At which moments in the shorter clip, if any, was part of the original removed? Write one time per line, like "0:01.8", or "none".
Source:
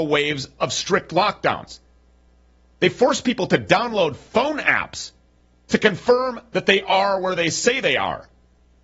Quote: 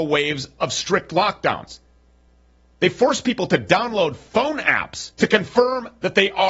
0:05.1

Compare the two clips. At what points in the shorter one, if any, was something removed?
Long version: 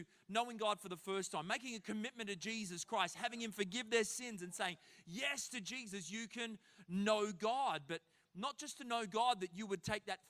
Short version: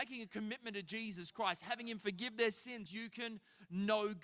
0:02.9

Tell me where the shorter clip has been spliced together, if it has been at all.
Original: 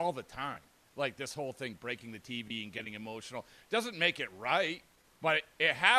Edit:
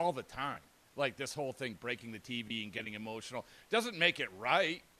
none

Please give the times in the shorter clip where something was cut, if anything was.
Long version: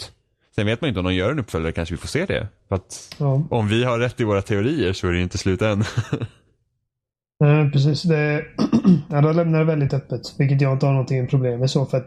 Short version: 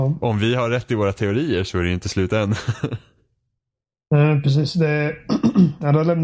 none

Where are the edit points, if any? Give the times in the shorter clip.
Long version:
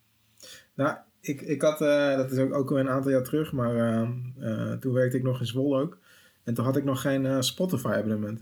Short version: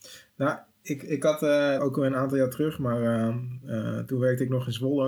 0:01.8

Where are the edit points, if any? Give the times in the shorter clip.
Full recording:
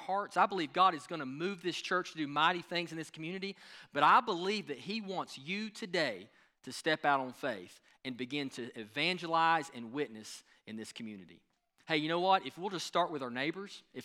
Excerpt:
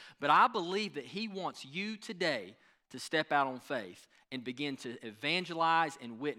none

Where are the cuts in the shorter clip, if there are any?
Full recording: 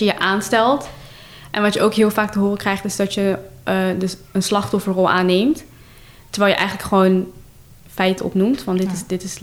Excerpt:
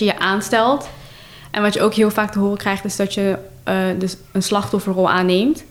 none

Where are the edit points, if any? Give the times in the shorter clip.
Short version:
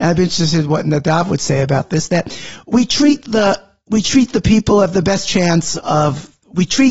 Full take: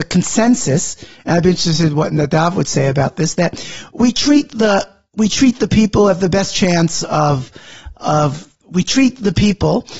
0:05.8

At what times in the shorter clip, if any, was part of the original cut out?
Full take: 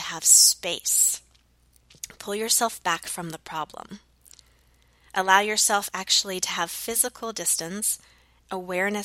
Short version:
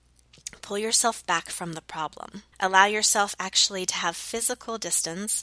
0:02.5

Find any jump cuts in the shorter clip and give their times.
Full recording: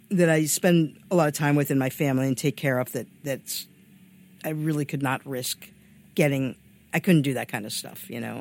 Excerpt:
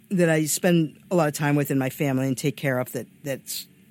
none

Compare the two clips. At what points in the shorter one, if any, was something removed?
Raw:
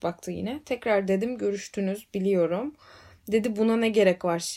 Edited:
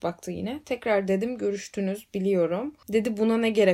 0:02.8

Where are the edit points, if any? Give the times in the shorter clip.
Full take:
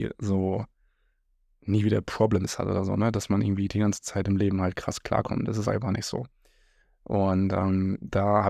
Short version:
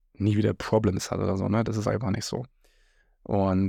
0:01.6

